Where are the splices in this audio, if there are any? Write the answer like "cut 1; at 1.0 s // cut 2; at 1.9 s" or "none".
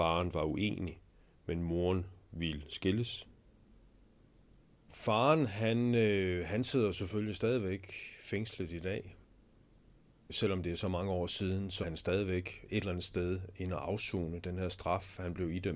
cut 1; at 11.8 s